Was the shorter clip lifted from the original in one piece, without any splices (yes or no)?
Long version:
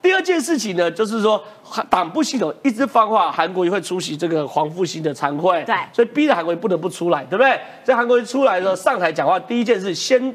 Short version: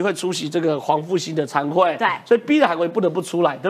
yes